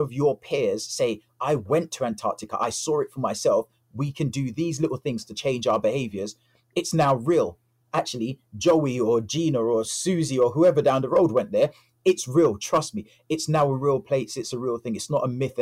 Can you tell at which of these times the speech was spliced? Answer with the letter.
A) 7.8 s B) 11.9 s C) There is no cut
A